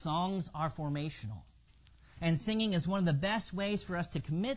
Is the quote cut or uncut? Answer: cut